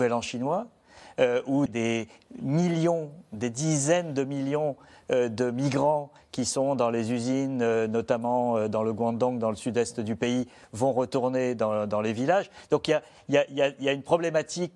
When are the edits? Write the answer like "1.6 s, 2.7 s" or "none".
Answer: 1.7 s